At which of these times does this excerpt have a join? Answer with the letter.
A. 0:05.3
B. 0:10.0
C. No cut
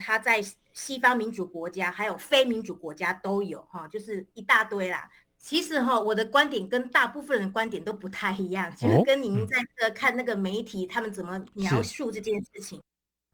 A